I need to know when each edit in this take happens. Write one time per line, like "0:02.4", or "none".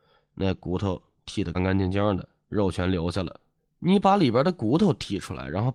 0:01.5
0:03.6